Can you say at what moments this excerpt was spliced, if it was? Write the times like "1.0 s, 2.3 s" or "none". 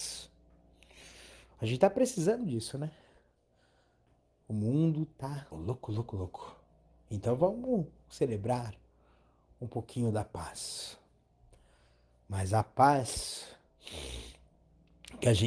5.5 s